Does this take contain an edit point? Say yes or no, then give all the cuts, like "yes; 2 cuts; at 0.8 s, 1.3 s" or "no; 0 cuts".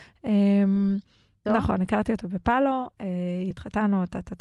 yes; 2 cuts; at 1.5 s, 3.5 s